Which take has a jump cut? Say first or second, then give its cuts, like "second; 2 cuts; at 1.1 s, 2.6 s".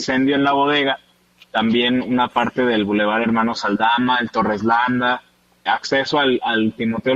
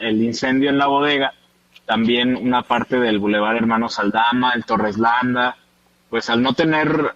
first; 1 cut; at 5.7 s